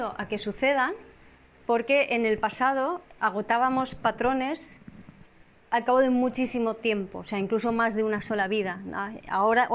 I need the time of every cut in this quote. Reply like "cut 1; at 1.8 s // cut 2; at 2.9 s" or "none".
cut 1; at 3.2 s